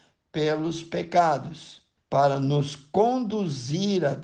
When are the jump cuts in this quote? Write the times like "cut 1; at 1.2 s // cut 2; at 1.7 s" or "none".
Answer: cut 1; at 2.0 s